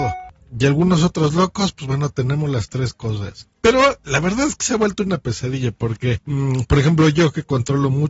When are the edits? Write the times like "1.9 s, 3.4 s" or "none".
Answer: none

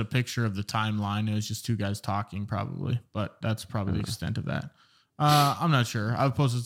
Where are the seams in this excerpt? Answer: none

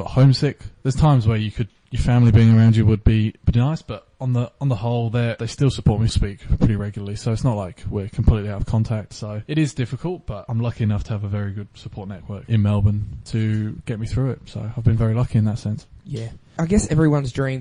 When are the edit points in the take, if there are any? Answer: 6.1 s

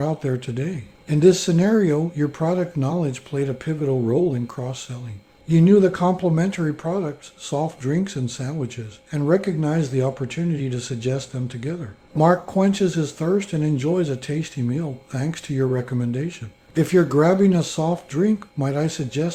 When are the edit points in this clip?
1.0 s, 16.7 s

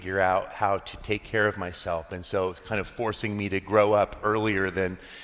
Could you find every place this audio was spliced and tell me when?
none

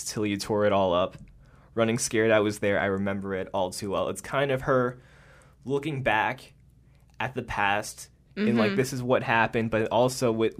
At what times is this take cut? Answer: 8.2 s

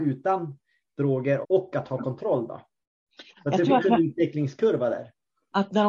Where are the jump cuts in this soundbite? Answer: 1.4 s

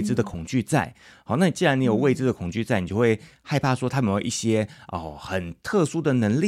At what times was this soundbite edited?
none

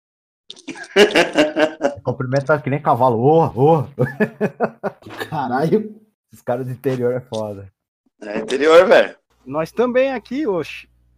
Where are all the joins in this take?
none

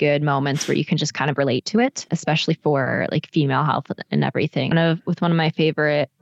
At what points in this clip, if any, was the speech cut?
2.1 s, 4.7 s

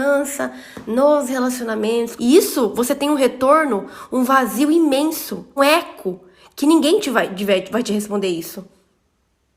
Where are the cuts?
2.2 s, 5.6 s

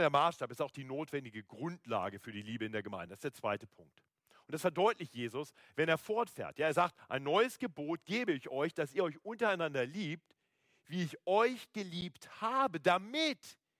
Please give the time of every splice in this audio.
none

